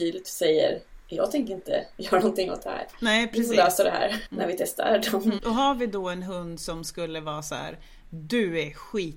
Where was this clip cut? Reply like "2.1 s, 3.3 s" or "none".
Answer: 4.3 s, 5.4 s